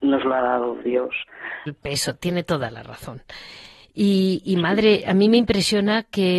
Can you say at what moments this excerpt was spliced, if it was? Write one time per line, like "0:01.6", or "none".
0:01.7